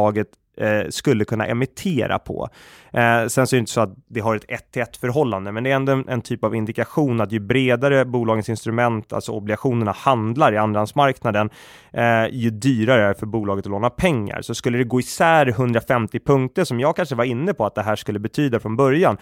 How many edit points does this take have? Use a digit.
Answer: 0